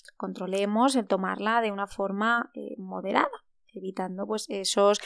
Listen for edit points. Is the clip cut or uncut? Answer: uncut